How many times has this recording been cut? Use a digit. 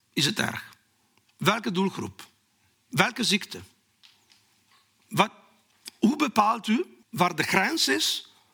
2